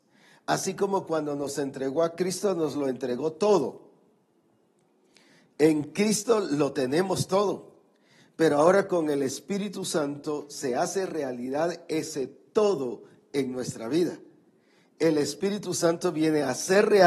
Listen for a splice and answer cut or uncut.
uncut